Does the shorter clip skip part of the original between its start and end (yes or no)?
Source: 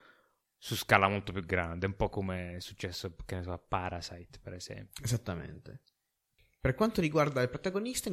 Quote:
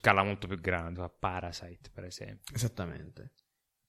yes